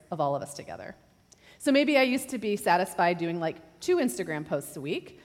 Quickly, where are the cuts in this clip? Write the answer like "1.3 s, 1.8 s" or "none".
none